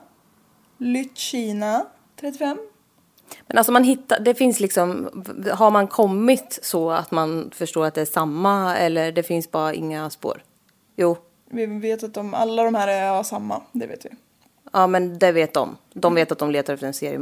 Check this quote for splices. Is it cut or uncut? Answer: uncut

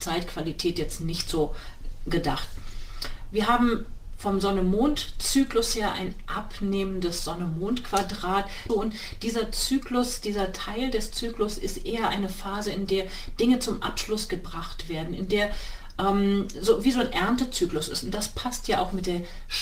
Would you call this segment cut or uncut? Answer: cut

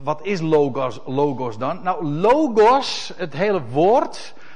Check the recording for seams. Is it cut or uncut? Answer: uncut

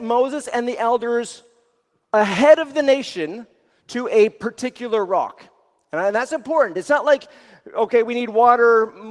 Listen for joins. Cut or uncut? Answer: uncut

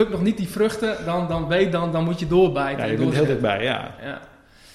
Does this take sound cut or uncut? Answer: uncut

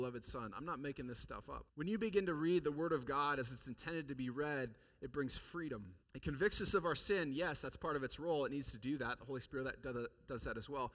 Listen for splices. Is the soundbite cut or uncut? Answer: cut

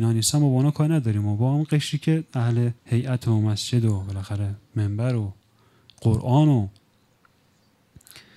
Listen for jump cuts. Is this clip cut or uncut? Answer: cut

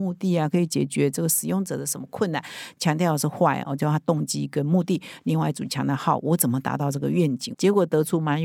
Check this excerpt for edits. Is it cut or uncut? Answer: uncut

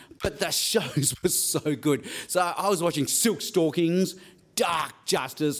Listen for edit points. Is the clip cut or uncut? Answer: uncut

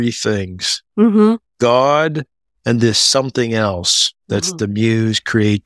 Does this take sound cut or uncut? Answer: cut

